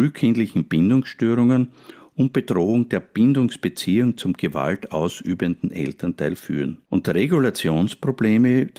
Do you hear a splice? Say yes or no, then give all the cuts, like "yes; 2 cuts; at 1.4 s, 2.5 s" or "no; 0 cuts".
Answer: yes; 1 cut; at 6.8 s